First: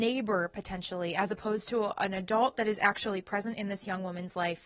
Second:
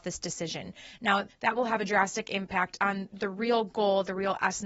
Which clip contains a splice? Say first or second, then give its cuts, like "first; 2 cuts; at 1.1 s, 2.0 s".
second; 2 cuts; at 1.3 s, 3.1 s